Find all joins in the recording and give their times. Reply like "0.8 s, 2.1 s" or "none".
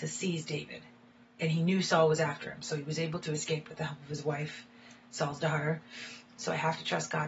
6.4 s